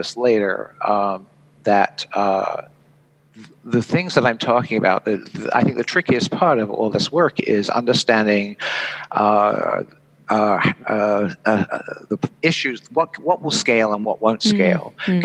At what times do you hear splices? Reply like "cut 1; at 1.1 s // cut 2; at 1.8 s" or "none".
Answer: none